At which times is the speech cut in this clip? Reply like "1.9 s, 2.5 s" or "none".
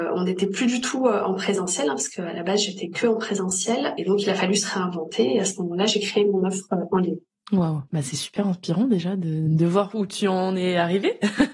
7.9 s